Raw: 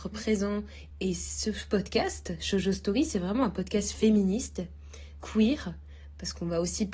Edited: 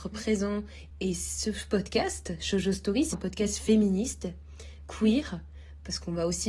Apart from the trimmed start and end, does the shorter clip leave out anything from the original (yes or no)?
yes